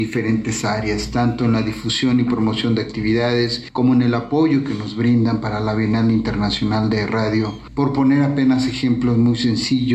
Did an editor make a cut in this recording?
no; 0 cuts

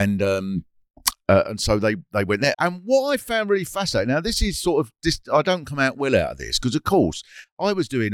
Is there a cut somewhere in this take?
yes; 1 cut; at 2.5 s

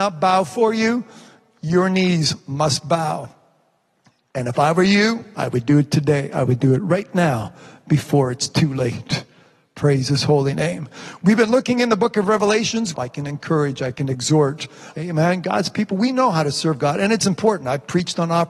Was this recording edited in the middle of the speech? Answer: yes; 2 cuts; at 12.9 s, 14.9 s

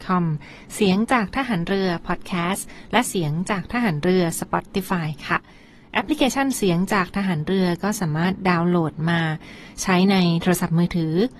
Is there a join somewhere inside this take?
no; 0 cuts

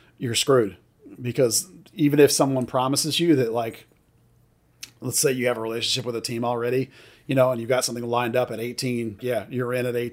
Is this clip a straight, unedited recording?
no; 1 cut; at 9.2 s

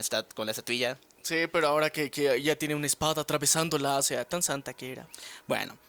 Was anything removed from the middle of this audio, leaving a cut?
no; 0 cuts

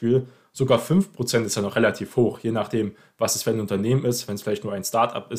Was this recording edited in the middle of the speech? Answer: no; 0 cuts

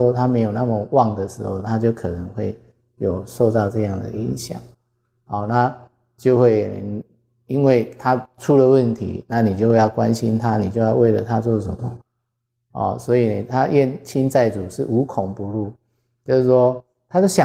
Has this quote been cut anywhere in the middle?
no; 0 cuts

